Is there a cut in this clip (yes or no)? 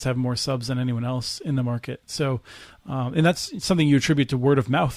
no